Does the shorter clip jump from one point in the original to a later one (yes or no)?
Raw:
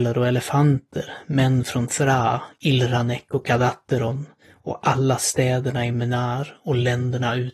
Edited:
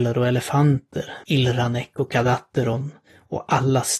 yes